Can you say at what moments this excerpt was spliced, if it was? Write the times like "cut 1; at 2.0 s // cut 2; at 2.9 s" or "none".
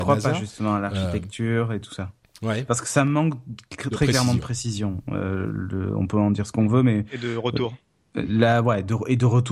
none

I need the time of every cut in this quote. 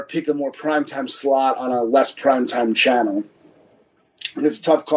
none

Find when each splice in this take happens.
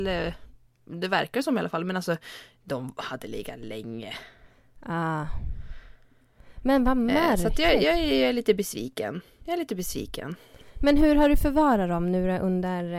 none

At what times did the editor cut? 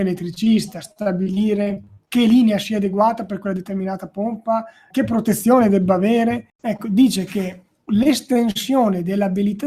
cut 1; at 4.9 s // cut 2; at 6.5 s

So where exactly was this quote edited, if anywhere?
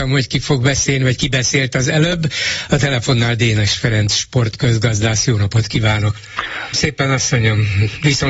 cut 1; at 6.7 s

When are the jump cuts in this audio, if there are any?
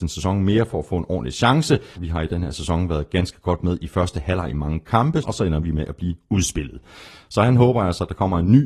cut 1; at 2.0 s // cut 2; at 5.2 s

